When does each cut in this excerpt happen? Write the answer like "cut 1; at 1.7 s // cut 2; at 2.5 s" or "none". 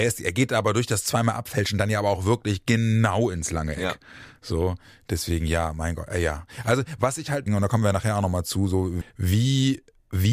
cut 1; at 7.5 s // cut 2; at 9.0 s

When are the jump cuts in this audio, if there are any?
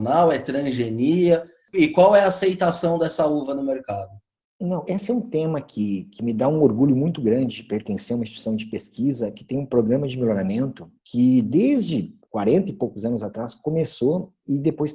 cut 1; at 4.9 s

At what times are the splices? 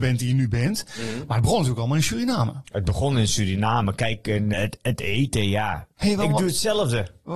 cut 1; at 4.5 s // cut 2; at 6.0 s

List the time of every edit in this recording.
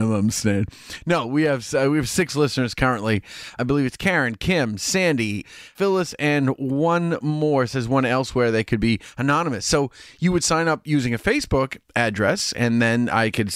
cut 1; at 5.4 s

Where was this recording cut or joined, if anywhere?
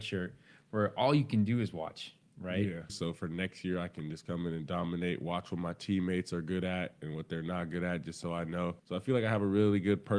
cut 1; at 2.9 s // cut 2; at 8.8 s

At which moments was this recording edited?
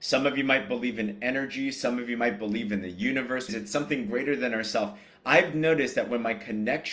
cut 1; at 3.5 s

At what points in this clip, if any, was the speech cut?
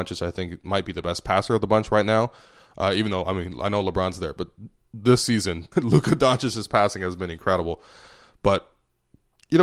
cut 1; at 5.7 s

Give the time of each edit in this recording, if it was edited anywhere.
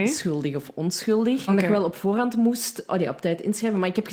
cut 1; at 1.5 s // cut 2; at 2.9 s

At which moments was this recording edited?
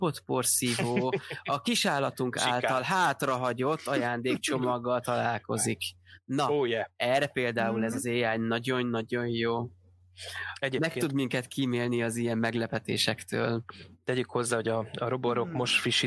none

